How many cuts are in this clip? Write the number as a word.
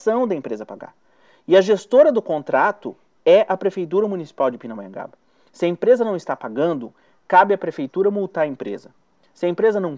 zero